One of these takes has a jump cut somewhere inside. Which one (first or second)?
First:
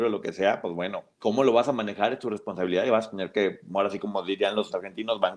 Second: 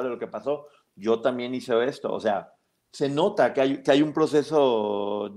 first